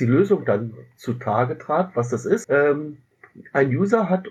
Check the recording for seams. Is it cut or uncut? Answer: cut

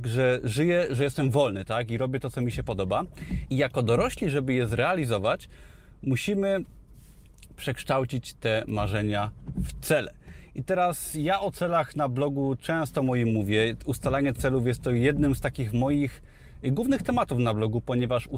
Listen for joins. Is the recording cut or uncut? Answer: cut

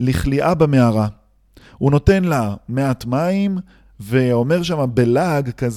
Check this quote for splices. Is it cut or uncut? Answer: cut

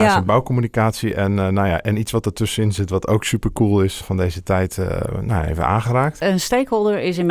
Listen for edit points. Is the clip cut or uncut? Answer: cut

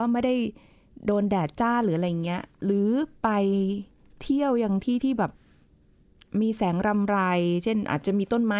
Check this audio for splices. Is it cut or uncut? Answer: uncut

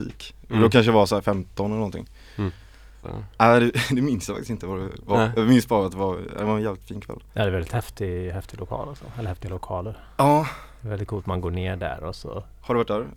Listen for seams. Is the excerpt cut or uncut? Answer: cut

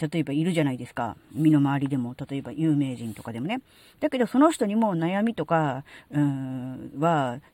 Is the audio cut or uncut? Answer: uncut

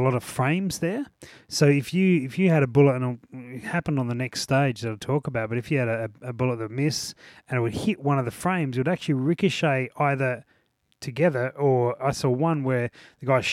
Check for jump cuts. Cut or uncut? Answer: uncut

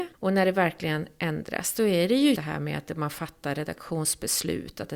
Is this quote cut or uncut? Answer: cut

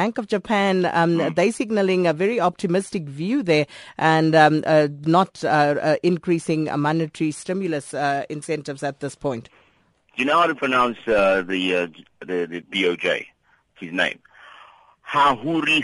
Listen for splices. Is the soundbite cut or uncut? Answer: cut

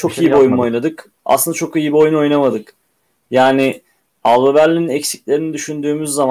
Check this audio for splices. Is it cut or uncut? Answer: uncut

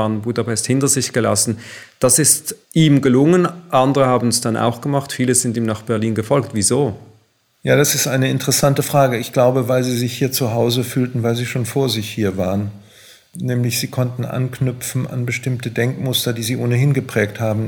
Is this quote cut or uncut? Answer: uncut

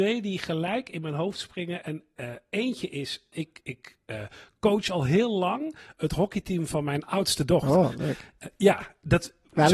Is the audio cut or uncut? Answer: cut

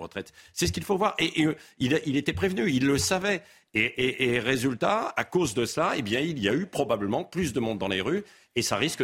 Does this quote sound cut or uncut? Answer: uncut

